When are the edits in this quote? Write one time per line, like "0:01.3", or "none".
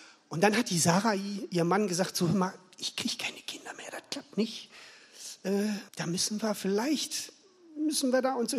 0:05.9